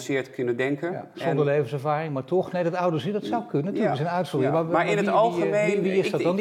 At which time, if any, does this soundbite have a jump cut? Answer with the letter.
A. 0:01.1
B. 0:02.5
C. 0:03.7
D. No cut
D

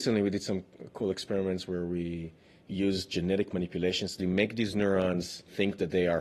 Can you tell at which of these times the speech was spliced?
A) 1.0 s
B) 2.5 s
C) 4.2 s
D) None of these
C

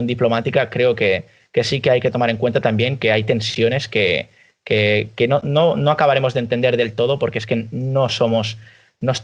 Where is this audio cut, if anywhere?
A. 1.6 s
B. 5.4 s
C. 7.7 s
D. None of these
B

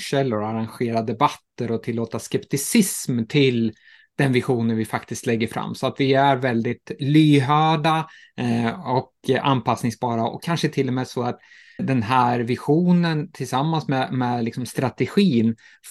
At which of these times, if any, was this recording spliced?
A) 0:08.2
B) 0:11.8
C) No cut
B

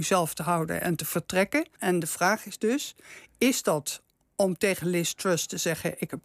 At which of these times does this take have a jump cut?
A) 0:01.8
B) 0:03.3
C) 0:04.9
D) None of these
A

